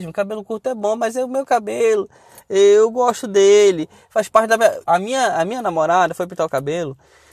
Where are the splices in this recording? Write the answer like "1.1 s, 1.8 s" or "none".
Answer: 4.9 s